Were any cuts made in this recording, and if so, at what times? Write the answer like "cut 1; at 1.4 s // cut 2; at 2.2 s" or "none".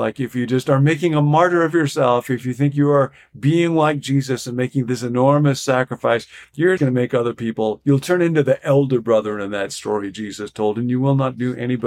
cut 1; at 6.8 s